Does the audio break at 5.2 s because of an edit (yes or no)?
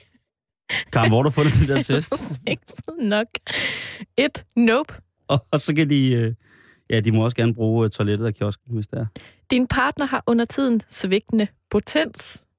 yes